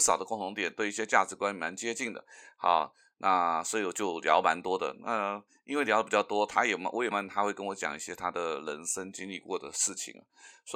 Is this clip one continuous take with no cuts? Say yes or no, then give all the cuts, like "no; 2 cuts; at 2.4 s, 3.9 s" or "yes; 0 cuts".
no; 1 cut; at 7.1 s